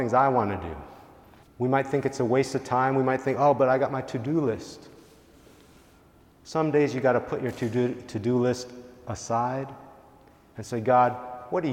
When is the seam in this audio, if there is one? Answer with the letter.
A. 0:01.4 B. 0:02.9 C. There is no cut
A